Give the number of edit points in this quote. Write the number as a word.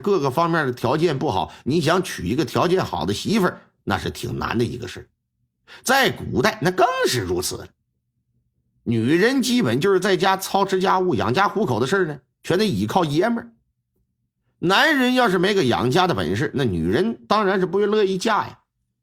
zero